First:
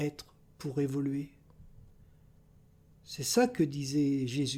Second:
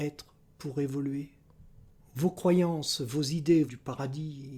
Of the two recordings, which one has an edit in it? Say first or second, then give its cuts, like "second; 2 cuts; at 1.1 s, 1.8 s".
second; 2 cuts; at 2.0 s, 3.7 s